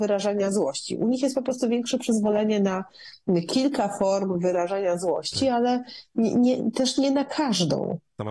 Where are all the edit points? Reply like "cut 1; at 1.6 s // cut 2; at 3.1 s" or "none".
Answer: none